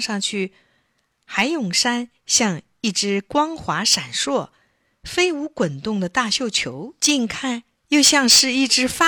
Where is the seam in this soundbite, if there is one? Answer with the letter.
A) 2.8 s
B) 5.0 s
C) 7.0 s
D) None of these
C